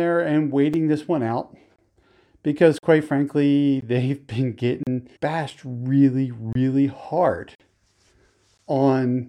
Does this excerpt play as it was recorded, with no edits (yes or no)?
no